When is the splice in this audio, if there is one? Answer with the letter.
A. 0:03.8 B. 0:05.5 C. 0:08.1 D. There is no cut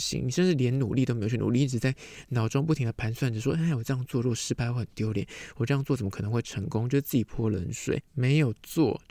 C